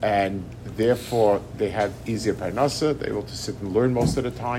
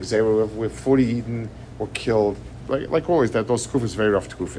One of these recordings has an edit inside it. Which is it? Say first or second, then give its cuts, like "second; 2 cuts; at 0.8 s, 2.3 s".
second; 1 cut; at 2.6 s